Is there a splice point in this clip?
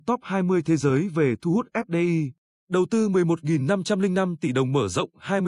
yes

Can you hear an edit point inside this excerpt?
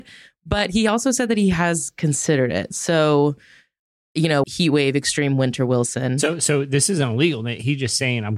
yes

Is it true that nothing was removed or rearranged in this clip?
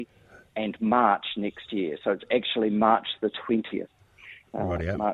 yes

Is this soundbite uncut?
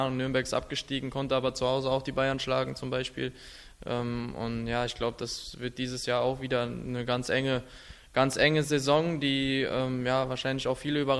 yes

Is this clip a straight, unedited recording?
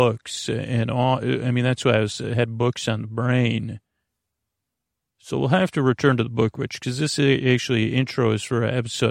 yes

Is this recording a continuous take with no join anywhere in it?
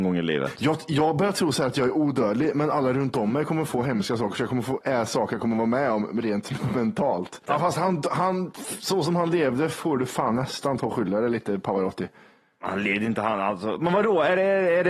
no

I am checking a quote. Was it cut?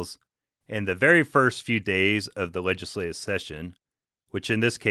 no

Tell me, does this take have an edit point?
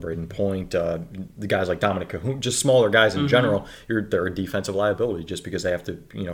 no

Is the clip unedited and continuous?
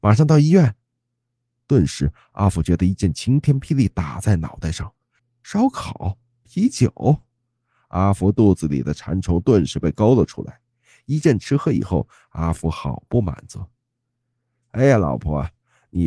no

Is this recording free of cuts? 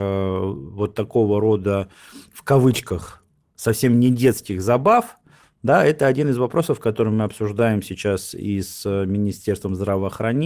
yes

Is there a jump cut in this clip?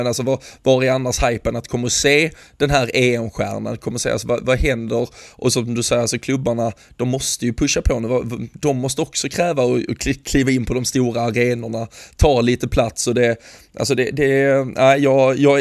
no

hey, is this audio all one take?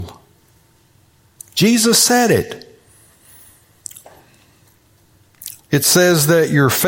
no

